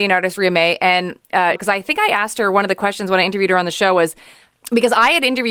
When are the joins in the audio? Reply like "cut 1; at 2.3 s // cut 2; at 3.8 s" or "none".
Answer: cut 1; at 1.6 s